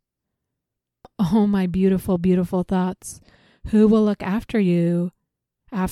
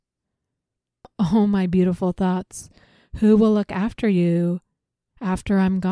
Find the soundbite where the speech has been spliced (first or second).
second